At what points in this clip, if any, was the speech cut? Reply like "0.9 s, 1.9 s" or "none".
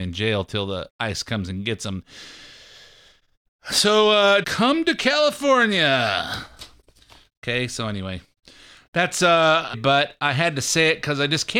4.4 s, 9.7 s